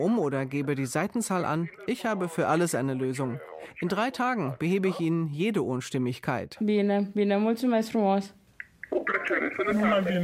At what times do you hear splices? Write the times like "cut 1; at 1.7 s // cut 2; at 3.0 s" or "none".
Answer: none